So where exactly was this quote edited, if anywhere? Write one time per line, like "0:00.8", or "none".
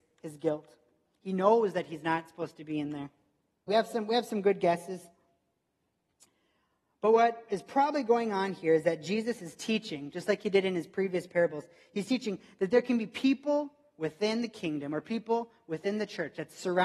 0:03.7